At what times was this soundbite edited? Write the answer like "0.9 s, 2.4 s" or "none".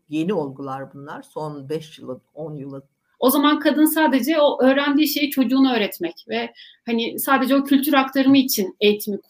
3.1 s